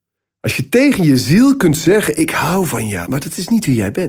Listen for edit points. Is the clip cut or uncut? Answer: cut